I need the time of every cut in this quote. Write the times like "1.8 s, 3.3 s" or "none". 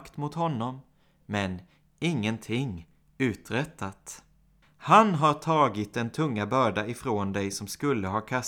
4.6 s